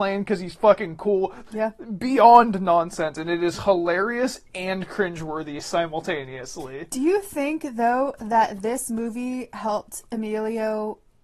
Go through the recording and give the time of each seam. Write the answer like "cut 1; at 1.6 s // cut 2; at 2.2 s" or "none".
cut 1; at 1.5 s

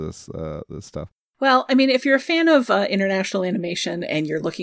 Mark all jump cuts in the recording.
none

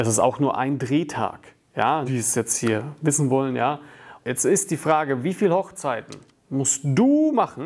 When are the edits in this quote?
cut 1; at 2.1 s // cut 2; at 4.2 s

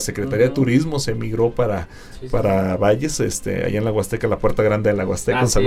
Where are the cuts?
none

